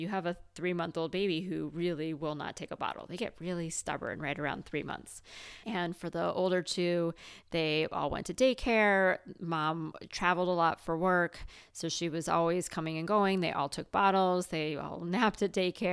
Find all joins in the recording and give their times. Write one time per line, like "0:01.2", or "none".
0:05.6